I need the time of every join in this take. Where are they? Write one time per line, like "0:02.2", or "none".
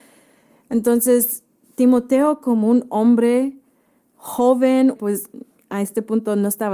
0:05.0